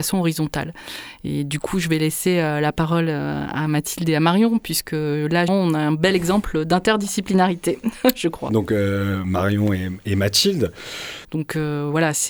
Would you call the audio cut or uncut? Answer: cut